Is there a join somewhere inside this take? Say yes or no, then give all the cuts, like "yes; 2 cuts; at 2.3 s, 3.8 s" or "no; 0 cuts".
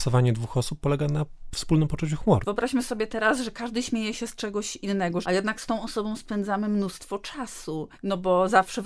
yes; 2 cuts; at 2.4 s, 5.2 s